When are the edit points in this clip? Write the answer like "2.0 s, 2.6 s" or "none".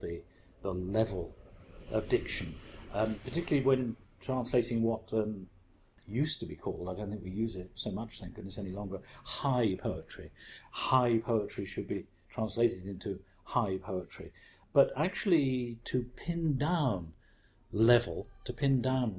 7.7 s